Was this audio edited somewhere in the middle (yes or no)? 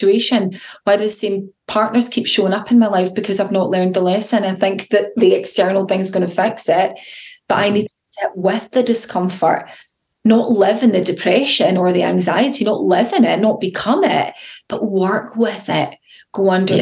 no